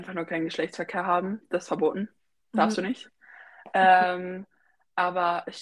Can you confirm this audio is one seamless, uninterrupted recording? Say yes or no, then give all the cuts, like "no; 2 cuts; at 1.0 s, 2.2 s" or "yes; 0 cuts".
yes; 0 cuts